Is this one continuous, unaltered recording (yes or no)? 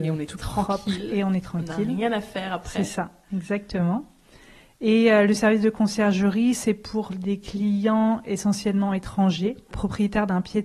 no